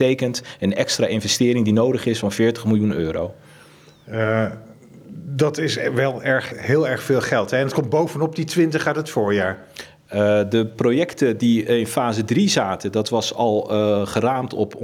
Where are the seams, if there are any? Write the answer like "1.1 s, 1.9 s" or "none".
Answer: 6.5 s